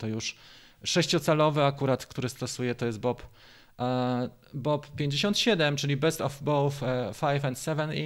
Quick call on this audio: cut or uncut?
uncut